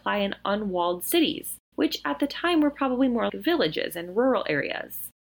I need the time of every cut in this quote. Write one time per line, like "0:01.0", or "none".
0:03.3